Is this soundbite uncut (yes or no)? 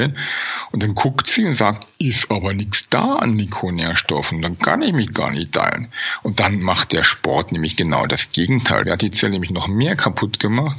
no